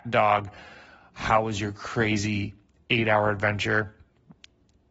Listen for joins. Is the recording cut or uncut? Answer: uncut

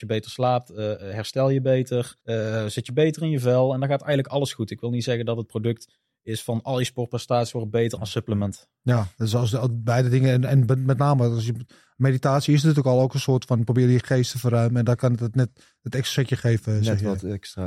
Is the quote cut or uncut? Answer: cut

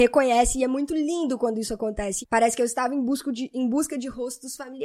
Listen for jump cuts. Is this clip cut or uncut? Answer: cut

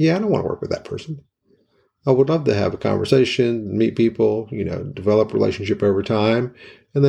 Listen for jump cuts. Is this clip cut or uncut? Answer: uncut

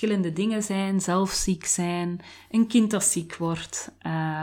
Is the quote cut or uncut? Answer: uncut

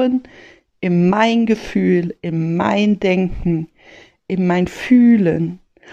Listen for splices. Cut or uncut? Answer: uncut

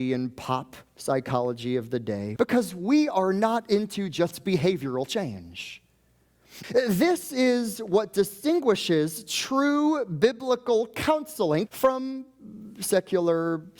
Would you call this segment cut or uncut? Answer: cut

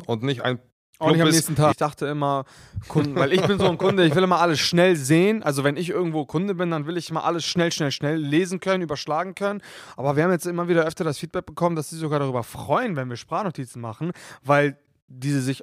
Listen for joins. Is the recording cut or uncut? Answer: cut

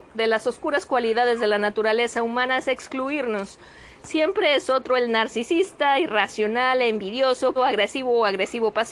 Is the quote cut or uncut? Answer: cut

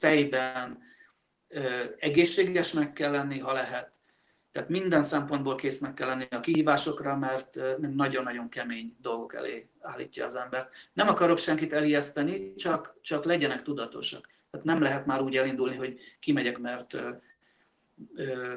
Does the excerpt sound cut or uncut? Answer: cut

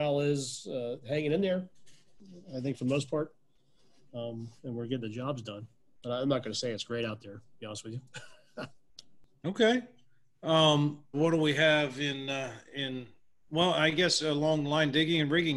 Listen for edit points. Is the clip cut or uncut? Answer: cut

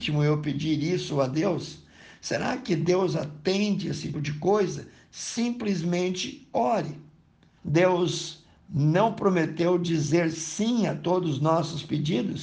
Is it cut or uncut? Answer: cut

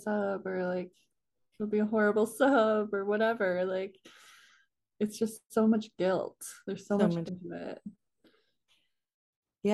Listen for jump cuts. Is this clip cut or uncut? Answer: cut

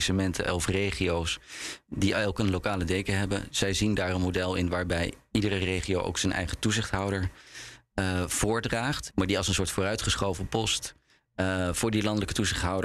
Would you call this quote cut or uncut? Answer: cut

